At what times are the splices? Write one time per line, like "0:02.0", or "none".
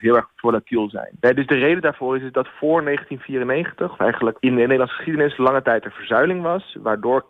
none